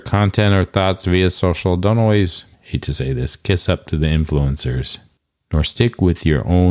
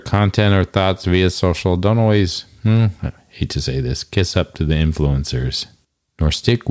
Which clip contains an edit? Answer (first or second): first